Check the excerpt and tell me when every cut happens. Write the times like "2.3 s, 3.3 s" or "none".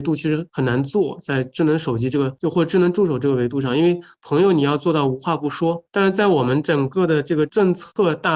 none